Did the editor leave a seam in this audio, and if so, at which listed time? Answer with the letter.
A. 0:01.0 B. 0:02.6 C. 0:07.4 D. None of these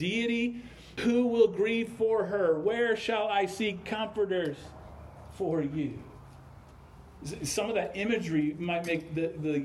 A